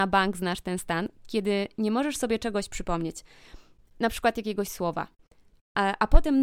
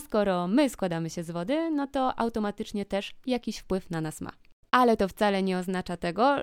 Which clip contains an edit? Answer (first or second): second